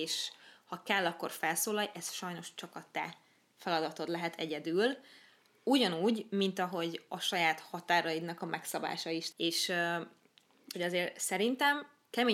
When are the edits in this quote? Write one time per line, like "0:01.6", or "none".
0:09.3
0:10.7